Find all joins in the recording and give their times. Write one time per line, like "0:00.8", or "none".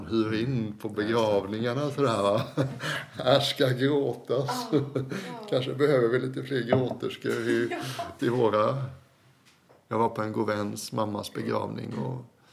0:08.2